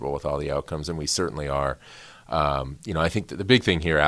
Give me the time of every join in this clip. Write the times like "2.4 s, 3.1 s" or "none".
none